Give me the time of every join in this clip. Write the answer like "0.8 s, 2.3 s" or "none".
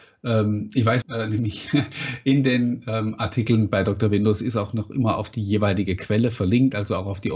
1.0 s